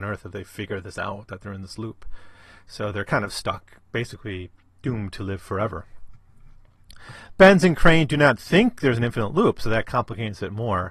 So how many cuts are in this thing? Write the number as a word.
zero